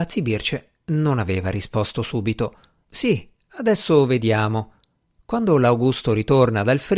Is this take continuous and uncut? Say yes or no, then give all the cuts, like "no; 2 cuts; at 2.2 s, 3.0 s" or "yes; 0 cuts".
no; 2 cuts; at 2.8 s, 5.1 s